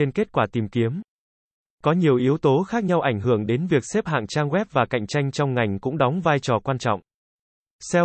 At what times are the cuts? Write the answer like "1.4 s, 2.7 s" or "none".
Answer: none

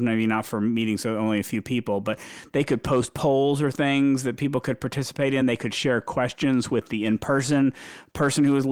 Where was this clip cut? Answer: none

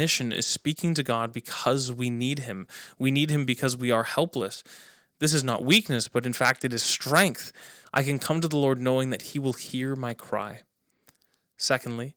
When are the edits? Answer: 7.8 s

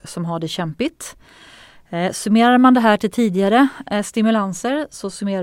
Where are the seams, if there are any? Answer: none

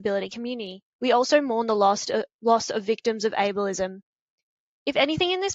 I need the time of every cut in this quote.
0.9 s

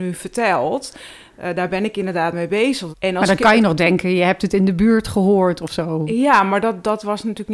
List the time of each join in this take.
2.9 s

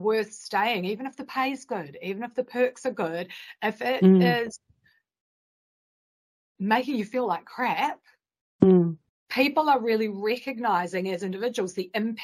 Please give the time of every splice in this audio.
9.1 s

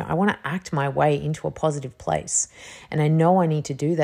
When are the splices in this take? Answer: none

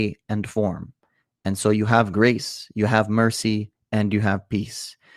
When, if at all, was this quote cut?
none

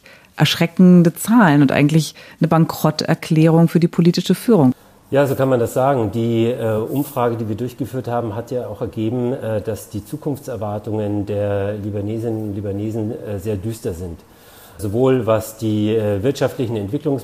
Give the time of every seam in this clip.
none

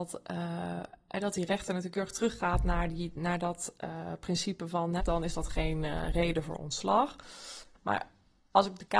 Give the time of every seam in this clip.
5.0 s, 7.7 s

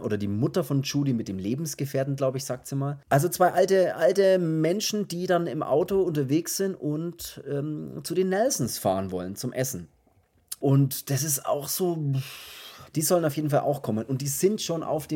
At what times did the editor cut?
10.6 s, 12.8 s

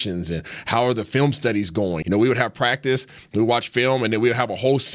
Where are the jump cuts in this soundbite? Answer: 2.0 s

